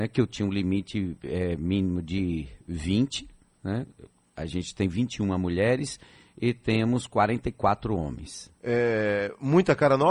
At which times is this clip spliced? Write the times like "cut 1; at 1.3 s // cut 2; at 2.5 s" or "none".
cut 1; at 8.6 s